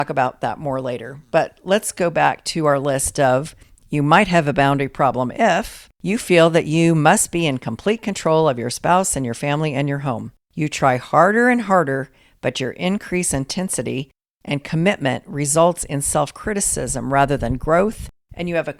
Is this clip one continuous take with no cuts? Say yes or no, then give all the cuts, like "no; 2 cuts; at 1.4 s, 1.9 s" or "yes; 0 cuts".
yes; 0 cuts